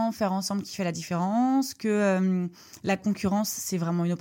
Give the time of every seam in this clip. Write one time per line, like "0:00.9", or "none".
0:03.0